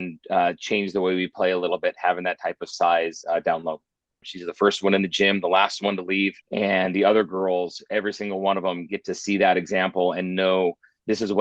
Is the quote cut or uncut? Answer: cut